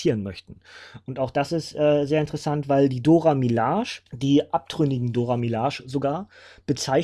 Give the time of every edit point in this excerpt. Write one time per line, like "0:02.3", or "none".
0:04.1